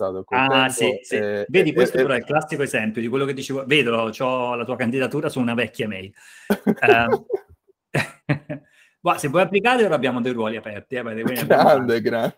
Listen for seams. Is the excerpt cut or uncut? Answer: uncut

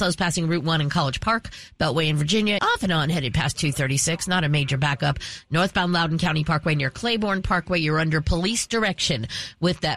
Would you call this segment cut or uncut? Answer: cut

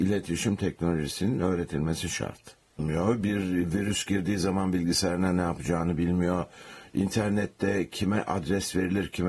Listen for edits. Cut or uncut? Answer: cut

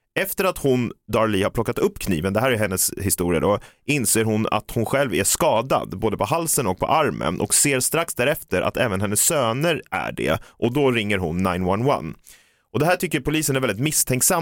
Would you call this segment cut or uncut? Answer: uncut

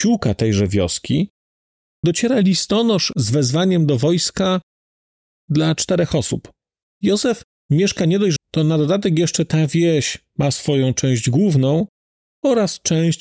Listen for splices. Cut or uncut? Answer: cut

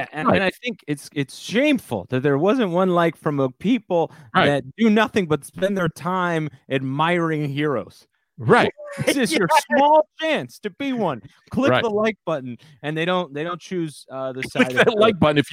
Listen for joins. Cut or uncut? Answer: uncut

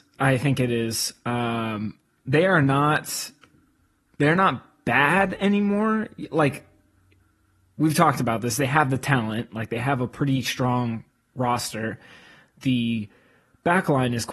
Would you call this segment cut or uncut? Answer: uncut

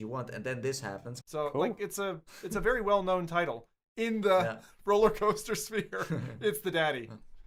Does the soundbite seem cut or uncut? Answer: cut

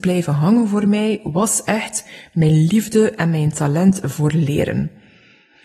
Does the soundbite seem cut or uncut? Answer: uncut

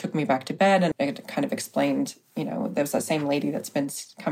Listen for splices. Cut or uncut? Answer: cut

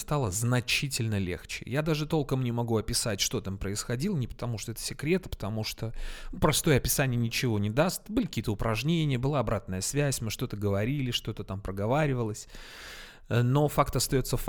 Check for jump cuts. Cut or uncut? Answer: uncut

